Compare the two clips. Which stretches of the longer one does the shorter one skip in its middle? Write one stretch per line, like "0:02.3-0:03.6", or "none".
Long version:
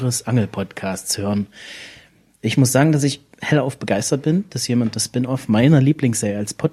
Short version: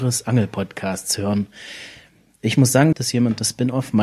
0:02.9-0:04.5